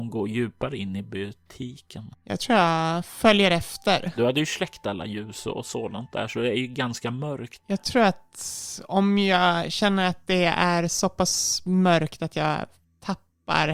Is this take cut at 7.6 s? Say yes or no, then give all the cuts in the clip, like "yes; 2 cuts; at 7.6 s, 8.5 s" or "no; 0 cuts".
yes; 2 cuts; at 4.2 s, 7.6 s